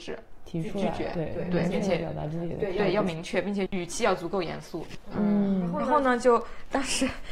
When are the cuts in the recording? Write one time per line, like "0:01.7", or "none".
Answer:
0:03.7
0:05.1